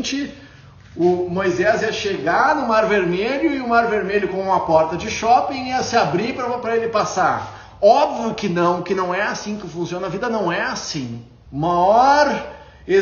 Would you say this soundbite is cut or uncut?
cut